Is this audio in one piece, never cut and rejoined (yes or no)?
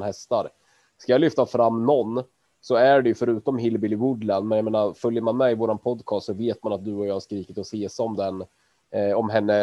yes